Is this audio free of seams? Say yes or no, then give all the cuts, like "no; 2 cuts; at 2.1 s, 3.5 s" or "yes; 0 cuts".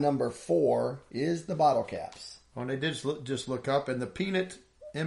yes; 0 cuts